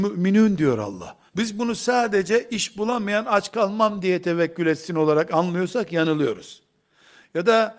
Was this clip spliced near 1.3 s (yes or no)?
yes